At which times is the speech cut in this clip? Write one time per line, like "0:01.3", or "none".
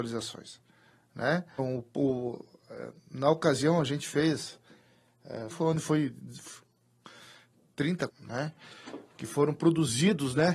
0:01.6
0:05.5
0:08.1